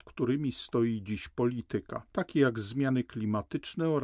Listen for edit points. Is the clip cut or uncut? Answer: uncut